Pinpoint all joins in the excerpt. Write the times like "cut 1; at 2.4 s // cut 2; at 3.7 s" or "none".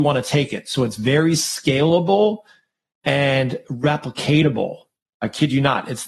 cut 1; at 5.1 s

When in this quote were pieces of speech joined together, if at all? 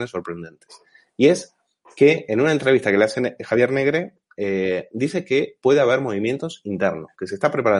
none

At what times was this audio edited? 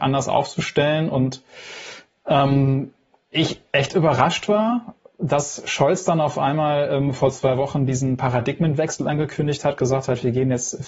none

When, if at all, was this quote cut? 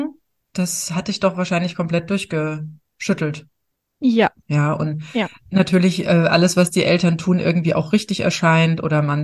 cut 1; at 4.4 s

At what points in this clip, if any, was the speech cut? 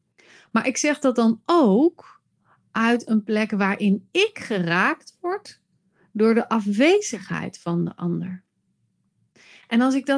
none

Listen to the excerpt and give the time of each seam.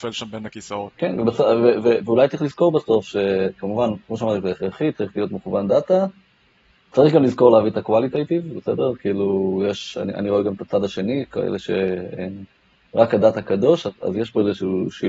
none

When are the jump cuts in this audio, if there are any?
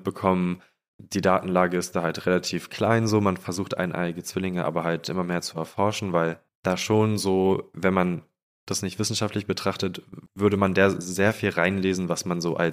cut 1; at 7.7 s // cut 2; at 10.3 s

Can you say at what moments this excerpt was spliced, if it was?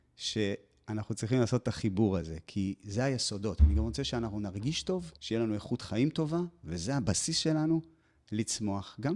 cut 1; at 5.2 s

